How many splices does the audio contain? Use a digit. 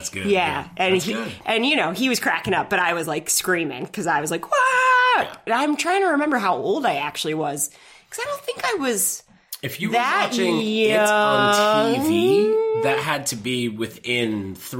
0